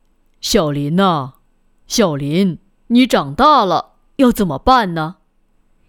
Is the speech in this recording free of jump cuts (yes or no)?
yes